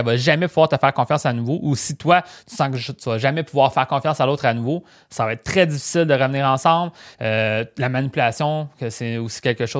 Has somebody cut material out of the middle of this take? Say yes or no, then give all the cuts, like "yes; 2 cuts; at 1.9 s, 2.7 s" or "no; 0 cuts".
yes; 1 cut; at 7.1 s